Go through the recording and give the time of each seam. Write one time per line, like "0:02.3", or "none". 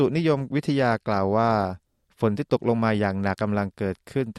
0:03.3